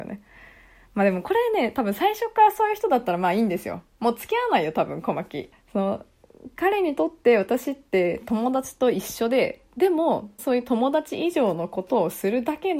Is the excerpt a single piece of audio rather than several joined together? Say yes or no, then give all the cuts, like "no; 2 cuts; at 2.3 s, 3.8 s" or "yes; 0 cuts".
no; 2 cuts; at 5.5 s, 10.4 s